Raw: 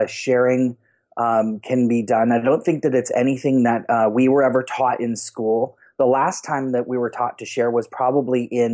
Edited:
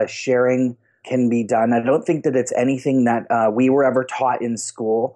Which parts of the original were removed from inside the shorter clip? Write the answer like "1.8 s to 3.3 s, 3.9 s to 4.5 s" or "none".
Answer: 1.0 s to 1.6 s